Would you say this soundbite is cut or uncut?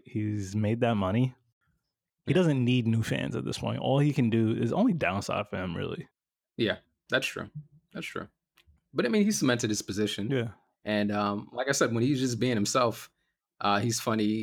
uncut